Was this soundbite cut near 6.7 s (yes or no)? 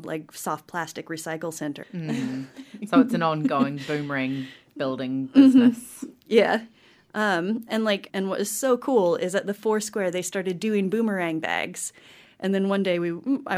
no